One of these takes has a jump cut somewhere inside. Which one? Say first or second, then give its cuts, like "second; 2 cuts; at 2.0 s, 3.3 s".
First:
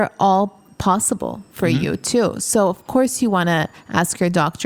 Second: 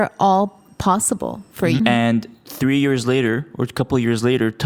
second; 1 cut; at 1.8 s